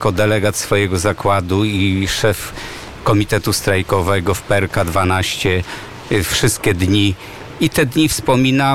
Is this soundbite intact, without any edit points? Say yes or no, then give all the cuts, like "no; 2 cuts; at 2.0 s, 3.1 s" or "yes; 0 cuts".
yes; 0 cuts